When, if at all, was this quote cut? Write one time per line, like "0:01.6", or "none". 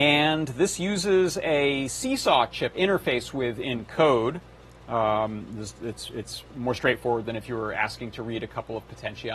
0:02.7